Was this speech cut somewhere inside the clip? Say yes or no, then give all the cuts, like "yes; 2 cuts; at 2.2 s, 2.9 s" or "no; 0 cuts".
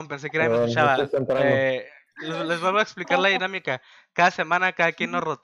no; 0 cuts